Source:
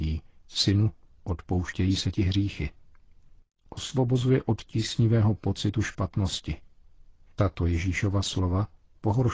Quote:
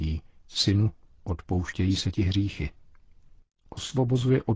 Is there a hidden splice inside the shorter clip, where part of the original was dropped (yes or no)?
no